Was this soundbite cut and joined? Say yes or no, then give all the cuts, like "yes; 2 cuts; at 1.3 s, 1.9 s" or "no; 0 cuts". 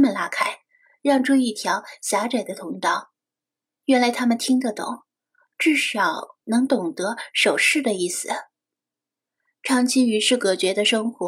no; 0 cuts